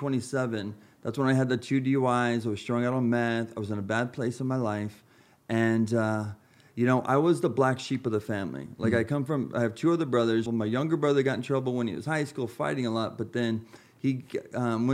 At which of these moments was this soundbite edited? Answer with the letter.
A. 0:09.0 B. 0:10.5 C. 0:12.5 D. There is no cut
B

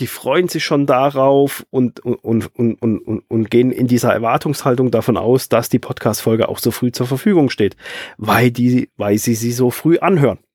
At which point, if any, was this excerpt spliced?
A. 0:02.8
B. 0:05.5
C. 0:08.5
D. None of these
D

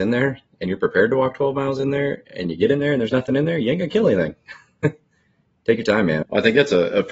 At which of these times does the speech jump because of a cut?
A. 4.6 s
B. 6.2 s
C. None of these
B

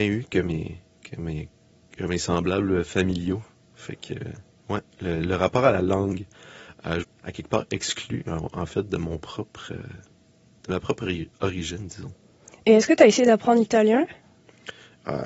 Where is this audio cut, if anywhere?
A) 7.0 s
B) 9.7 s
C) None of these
A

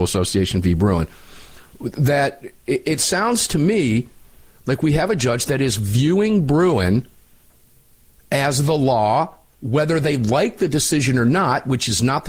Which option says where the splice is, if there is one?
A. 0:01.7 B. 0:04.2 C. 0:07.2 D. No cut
D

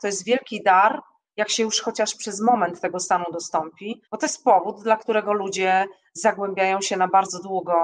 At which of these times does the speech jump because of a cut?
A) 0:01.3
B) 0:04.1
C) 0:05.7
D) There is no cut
B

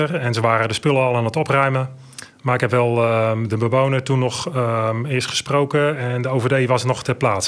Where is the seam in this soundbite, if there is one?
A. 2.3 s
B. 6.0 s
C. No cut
C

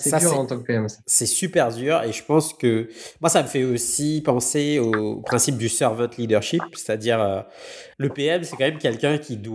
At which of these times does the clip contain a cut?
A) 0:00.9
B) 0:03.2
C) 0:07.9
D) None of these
C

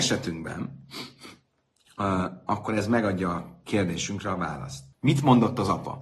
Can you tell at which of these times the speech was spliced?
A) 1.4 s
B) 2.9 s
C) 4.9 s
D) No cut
C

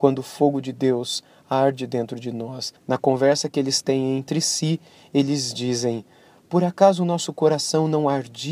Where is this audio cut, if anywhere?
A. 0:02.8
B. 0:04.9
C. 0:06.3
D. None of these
A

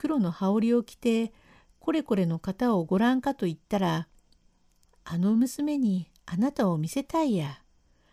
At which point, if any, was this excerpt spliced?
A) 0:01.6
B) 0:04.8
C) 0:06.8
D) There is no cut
B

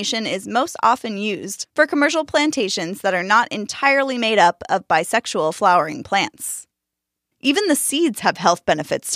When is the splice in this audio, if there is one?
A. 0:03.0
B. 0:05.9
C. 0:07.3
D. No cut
C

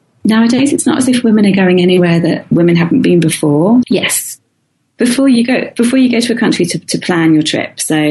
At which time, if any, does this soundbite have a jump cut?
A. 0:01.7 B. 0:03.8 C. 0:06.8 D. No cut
B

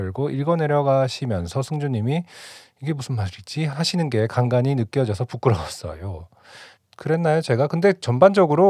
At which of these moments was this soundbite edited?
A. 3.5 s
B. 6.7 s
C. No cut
C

